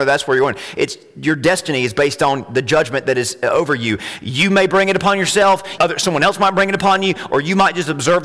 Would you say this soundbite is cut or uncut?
cut